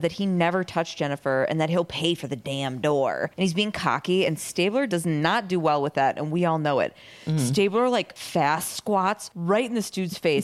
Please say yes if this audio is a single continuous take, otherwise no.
yes